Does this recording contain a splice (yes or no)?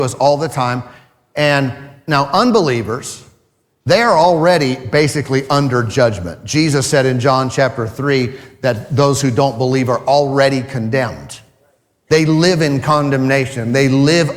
no